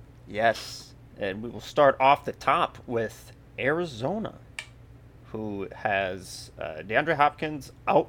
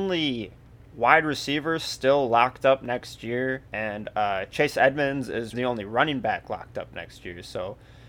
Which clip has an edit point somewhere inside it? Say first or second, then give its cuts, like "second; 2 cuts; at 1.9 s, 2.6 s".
second; 2 cuts; at 3.7 s, 5.5 s